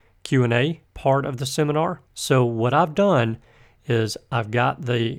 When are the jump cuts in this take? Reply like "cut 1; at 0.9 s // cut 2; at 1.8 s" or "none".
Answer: none